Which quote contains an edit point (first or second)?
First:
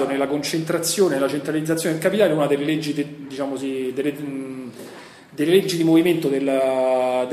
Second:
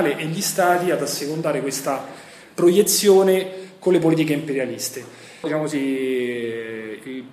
second